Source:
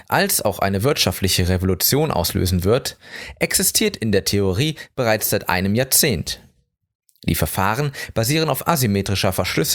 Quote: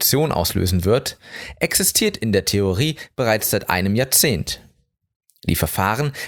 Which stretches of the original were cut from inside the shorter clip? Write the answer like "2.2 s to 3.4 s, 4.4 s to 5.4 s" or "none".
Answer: none